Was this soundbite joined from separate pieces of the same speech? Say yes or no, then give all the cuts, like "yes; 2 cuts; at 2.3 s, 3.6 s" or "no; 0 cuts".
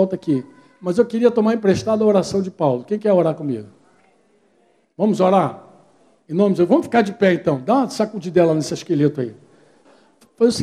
no; 0 cuts